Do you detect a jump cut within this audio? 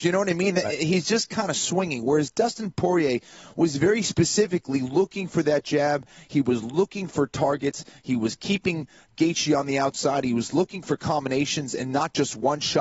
no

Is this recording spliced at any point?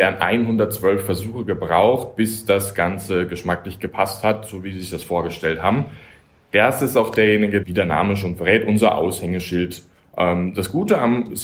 yes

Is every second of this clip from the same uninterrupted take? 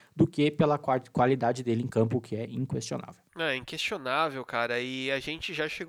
yes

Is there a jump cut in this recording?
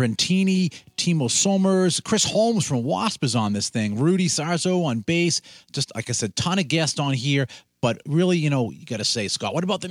no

